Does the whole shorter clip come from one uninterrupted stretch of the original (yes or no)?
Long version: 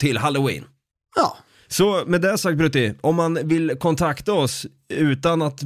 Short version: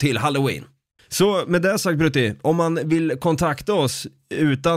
no